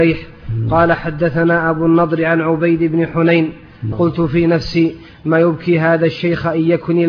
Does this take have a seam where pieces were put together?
yes; 1 cut; at 3.9 s

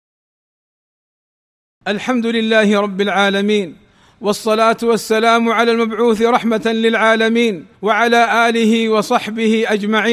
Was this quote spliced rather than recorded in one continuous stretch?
yes; 1 cut; at 7.7 s

